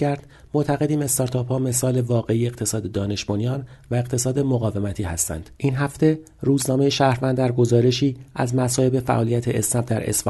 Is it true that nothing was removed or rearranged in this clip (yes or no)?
no